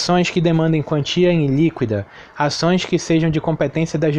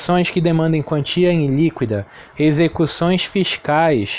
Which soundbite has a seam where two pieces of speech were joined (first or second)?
second